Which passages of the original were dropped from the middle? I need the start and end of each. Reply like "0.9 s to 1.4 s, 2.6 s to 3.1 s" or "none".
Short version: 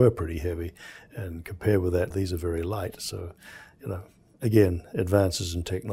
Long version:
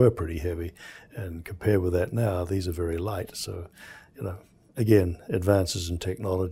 2.1 s to 2.5 s